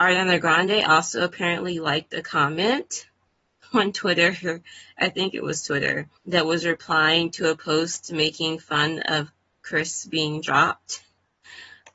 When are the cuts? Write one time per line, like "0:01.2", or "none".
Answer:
0:06.2